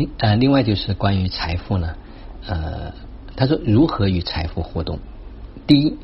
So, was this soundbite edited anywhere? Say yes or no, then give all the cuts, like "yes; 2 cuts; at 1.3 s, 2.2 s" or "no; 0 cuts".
yes; 1 cut; at 3.3 s